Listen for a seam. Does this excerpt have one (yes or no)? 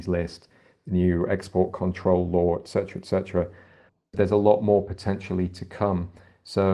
no